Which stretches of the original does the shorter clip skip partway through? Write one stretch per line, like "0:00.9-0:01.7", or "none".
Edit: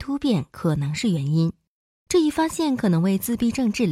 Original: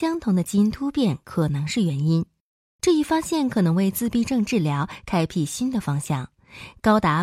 none